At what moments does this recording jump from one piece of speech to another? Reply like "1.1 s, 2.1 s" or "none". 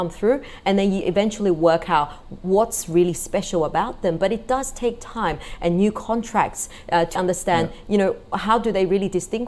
7.2 s